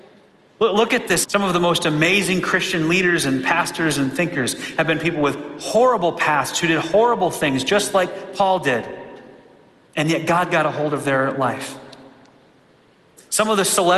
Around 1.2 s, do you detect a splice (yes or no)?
yes